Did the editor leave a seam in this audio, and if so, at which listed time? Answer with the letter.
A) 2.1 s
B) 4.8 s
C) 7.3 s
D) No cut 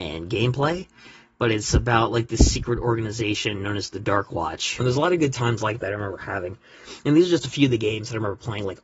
B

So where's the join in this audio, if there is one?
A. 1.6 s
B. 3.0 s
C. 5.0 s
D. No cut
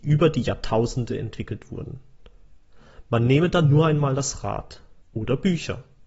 C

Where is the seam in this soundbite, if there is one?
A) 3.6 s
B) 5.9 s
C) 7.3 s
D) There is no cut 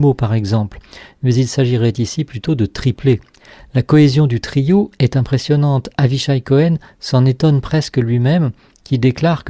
D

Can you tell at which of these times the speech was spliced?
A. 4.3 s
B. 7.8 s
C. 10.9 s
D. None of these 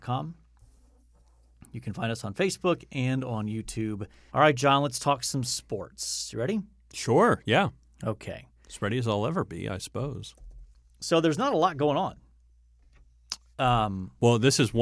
A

